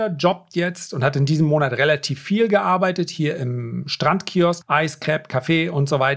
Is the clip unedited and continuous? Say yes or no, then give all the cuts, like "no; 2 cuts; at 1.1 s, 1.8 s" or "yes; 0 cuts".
no; 1 cut; at 4.6 s